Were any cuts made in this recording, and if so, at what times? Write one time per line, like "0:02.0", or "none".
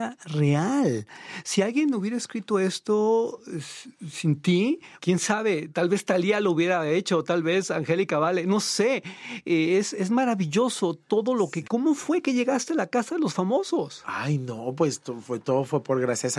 0:05.0
0:11.6